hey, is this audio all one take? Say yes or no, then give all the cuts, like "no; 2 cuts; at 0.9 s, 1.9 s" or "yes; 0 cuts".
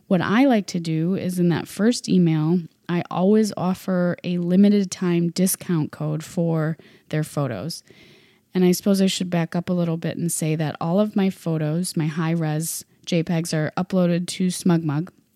no; 1 cut; at 11.9 s